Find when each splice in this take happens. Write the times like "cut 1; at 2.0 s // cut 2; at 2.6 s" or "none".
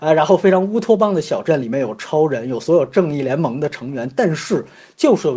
none